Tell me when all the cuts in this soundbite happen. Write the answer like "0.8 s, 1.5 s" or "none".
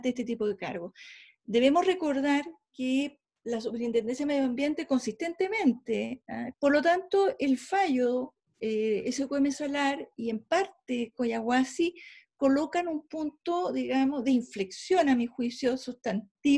6.5 s